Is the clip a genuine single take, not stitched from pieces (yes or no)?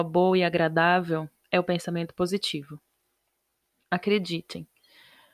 yes